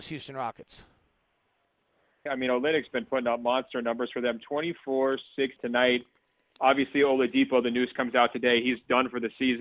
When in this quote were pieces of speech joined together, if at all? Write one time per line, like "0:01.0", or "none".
0:02.3
0:05.6